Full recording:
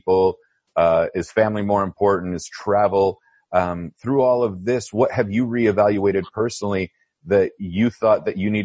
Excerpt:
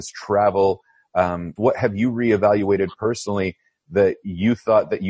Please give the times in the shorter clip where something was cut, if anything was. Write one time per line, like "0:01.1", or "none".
0:01.6